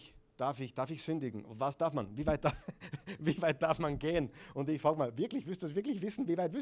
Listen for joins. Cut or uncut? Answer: uncut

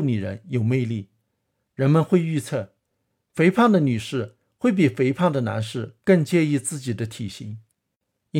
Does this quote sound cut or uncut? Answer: cut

